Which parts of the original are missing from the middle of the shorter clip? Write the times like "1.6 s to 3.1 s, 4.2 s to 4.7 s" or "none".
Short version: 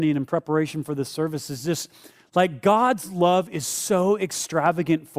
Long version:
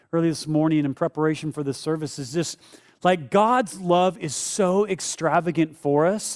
none